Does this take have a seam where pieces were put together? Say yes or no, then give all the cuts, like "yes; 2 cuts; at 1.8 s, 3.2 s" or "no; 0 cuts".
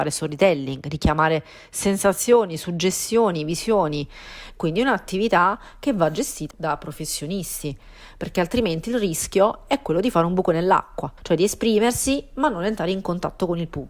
yes; 2 cuts; at 6.5 s, 11.2 s